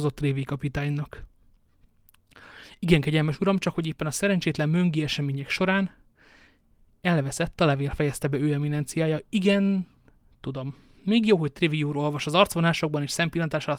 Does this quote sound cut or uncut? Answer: uncut